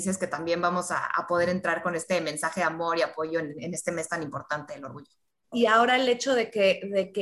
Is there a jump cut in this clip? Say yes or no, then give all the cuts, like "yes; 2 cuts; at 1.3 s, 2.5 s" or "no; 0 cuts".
yes; 1 cut; at 5.5 s